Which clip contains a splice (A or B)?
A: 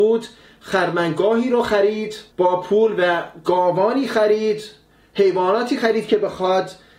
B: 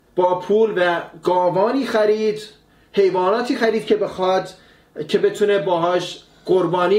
A